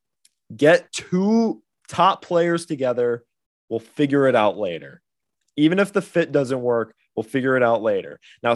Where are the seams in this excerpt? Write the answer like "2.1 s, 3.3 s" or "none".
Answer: none